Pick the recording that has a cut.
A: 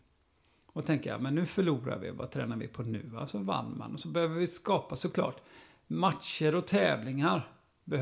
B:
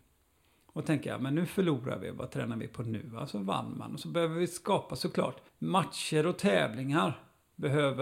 B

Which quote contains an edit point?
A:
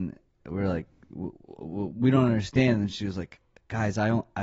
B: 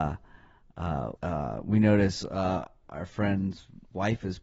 B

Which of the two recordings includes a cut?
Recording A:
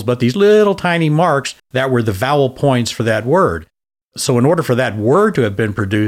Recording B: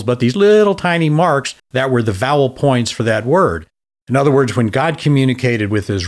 B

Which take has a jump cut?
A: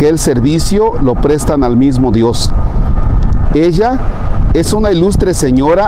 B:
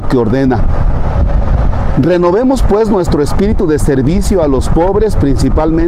A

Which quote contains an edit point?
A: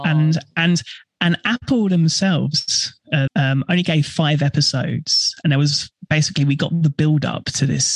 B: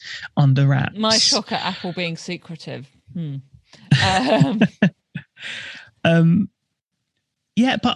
A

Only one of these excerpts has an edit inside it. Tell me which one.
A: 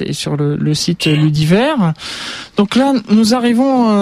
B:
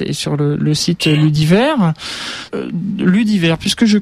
B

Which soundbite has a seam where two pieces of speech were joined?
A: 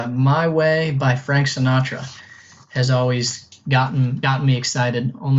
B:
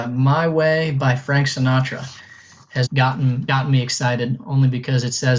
B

